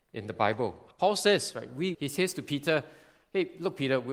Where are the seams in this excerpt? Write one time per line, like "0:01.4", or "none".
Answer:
0:00.9
0:01.9